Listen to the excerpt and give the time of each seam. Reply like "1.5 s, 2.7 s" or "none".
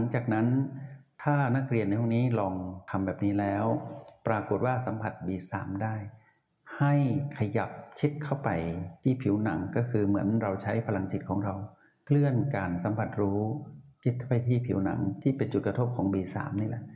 none